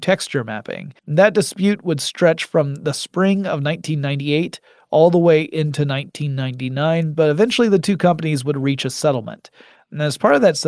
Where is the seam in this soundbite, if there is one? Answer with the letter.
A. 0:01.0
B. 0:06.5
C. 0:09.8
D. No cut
A